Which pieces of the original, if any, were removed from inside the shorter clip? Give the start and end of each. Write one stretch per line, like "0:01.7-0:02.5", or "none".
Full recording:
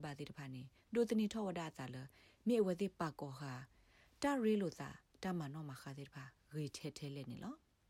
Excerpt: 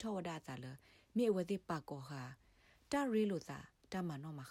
none